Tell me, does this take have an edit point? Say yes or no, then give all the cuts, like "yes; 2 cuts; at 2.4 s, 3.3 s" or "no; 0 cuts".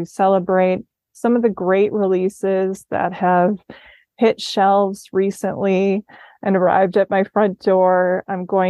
no; 0 cuts